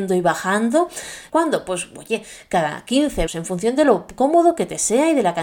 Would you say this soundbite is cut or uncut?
cut